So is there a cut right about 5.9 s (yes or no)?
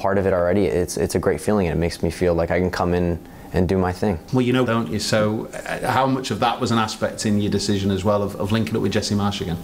no